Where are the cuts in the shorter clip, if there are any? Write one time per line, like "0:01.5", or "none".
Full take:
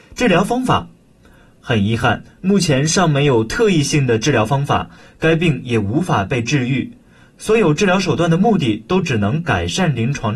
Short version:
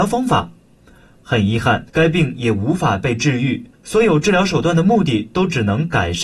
0:01.9
0:03.7